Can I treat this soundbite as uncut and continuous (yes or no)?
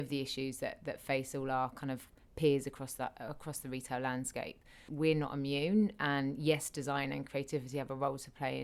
no